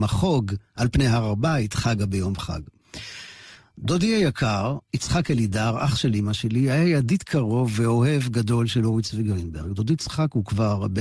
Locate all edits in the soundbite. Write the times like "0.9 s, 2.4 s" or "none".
none